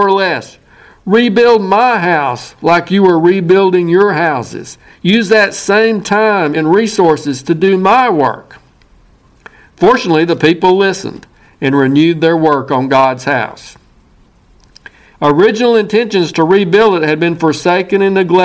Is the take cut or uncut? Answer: cut